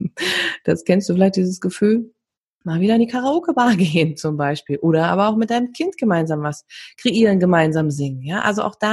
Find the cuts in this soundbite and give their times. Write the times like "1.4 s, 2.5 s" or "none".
2.6 s